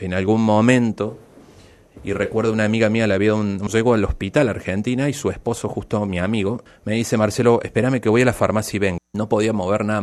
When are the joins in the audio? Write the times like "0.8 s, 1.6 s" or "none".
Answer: 3.7 s, 6.7 s, 9.0 s

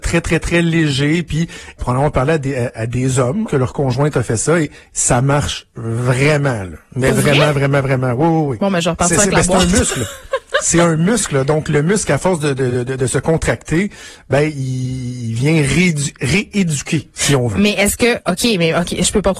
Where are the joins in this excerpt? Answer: 1.8 s, 3.5 s

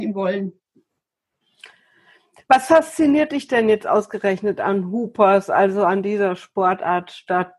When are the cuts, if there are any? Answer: none

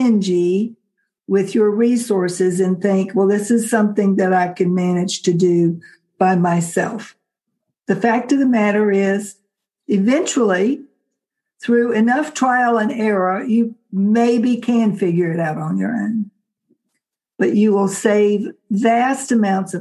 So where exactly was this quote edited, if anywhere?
none

